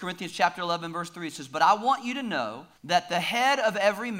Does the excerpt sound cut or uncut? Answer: cut